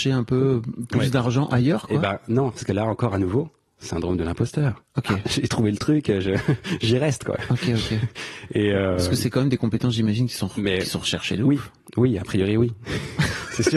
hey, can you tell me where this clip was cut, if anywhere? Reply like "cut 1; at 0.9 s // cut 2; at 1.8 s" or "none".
cut 1; at 4.9 s